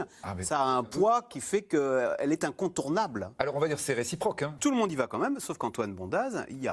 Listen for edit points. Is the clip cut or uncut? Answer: cut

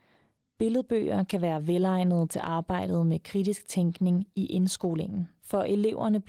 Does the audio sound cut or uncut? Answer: uncut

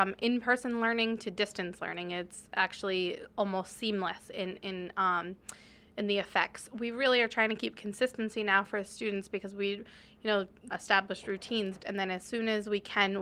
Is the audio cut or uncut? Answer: cut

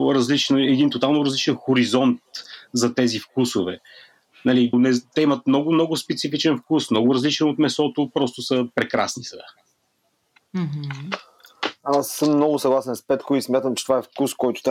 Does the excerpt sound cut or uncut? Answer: cut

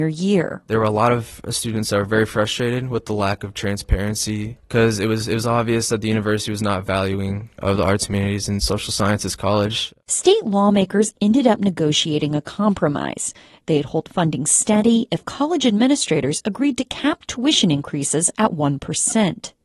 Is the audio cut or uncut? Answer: uncut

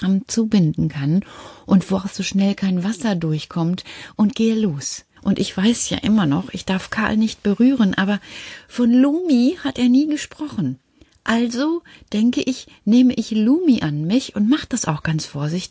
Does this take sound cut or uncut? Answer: cut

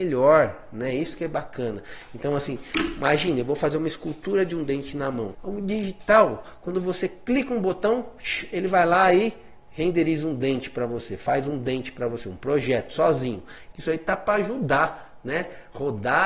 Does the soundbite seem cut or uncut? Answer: cut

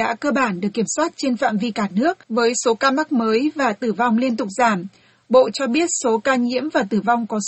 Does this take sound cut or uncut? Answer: cut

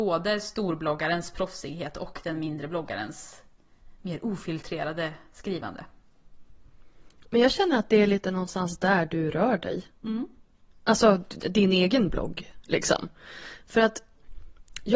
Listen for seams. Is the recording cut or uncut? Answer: uncut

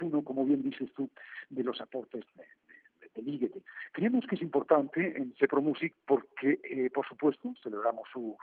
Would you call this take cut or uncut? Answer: cut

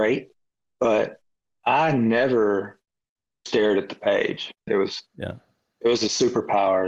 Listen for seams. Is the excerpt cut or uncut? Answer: cut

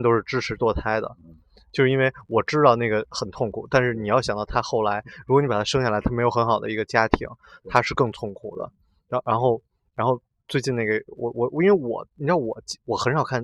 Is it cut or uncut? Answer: uncut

